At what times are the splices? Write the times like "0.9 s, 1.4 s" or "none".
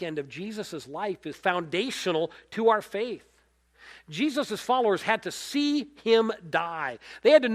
1.3 s